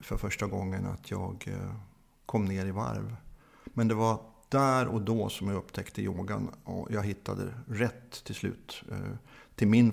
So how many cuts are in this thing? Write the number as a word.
one